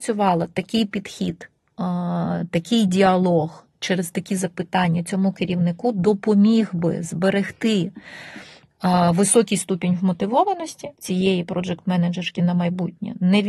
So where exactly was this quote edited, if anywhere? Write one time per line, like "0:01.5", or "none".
0:10.9

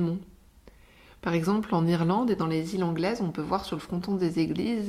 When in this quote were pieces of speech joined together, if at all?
none

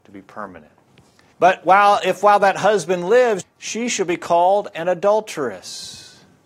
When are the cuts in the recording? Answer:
0:01.3
0:03.4

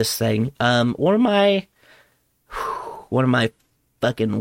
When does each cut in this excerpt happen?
none

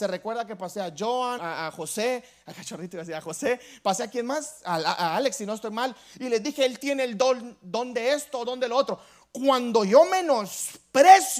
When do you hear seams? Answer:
0:01.4
0:08.5

